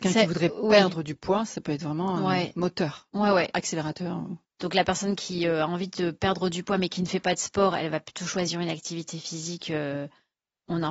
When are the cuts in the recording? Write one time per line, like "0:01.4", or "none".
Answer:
0:04.4